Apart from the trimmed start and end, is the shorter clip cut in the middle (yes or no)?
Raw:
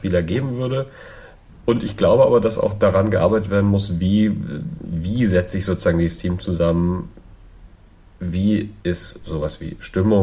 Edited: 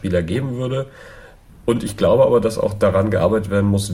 no